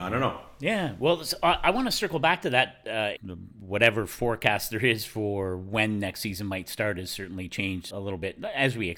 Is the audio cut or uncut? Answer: cut